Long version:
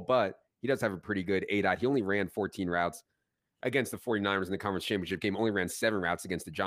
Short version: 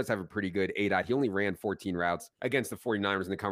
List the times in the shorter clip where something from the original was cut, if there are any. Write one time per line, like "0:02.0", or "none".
0:02.3